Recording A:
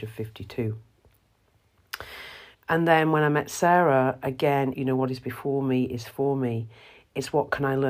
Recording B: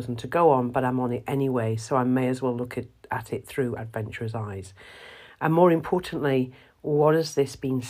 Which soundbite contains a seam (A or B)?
A